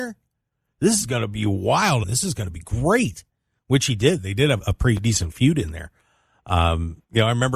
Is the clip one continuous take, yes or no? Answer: no